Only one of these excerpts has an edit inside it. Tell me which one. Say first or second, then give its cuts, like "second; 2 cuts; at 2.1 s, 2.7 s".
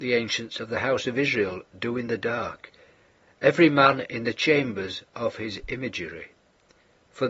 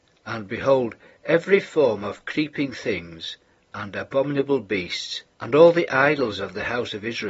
second; 1 cut; at 5.3 s